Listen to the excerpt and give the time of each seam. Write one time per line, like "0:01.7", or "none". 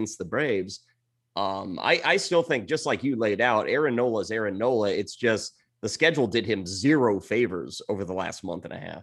0:01.2